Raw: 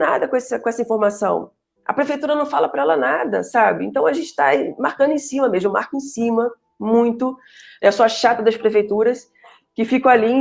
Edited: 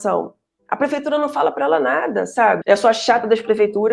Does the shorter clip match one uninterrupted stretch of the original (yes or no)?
no